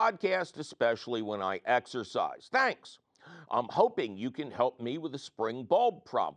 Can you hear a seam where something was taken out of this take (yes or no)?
no